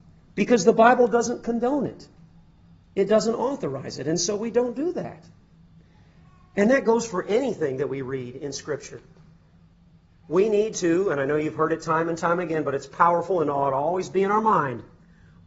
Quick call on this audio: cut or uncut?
uncut